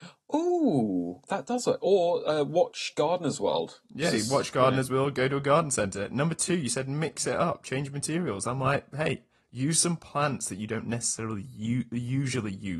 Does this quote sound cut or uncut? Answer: uncut